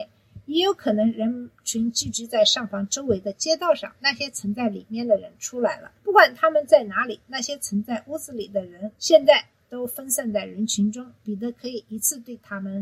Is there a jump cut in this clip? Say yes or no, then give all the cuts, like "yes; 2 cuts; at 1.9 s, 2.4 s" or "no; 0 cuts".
yes; 3 cuts; at 6.0 s, 8.9 s, 11.2 s